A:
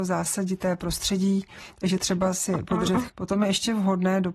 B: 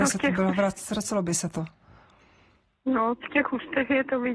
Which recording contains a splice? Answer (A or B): A